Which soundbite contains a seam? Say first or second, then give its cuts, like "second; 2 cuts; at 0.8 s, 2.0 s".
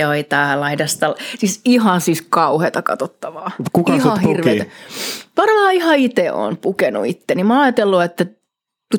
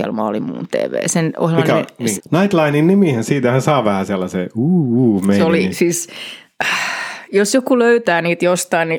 second; 1 cut; at 2.2 s